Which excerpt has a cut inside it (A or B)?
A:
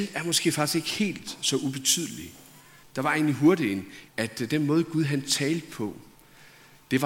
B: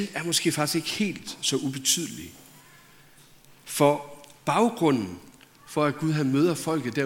A